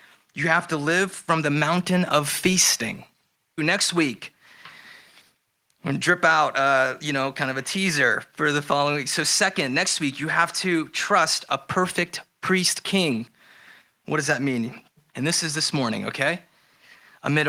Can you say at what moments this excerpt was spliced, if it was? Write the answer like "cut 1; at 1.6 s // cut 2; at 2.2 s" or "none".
cut 1; at 3.6 s // cut 2; at 15.1 s